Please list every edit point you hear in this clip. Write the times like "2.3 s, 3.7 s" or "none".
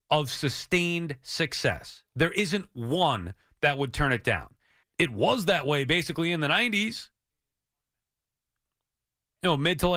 4.8 s